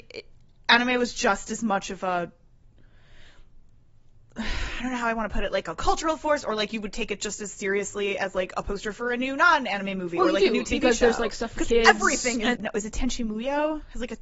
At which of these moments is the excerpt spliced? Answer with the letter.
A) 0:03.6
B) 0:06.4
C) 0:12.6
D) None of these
C